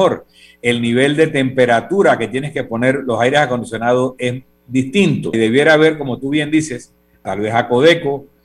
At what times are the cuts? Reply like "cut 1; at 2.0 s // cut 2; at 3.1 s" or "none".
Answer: cut 1; at 5.3 s // cut 2; at 7.3 s

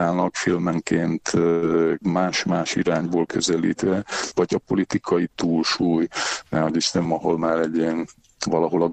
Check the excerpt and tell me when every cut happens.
cut 1; at 7.1 s

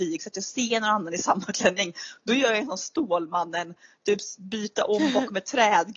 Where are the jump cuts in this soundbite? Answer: none

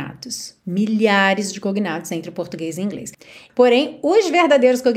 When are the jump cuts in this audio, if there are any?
cut 1; at 3.5 s

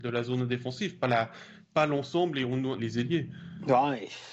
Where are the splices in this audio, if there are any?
cut 1; at 2.8 s

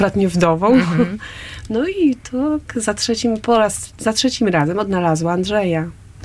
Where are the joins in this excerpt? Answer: none

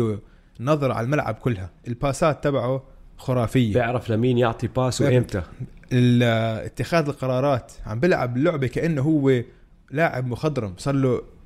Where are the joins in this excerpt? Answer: none

